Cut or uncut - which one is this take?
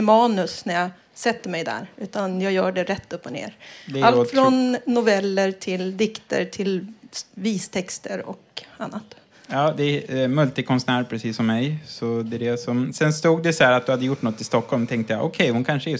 uncut